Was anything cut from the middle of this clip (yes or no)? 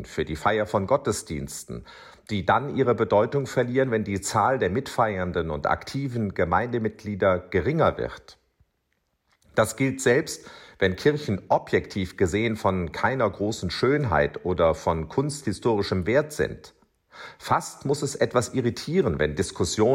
no